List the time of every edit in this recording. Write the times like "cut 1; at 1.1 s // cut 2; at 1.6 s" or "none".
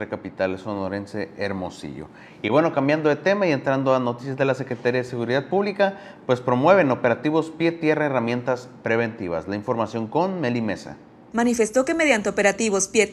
cut 1; at 11.3 s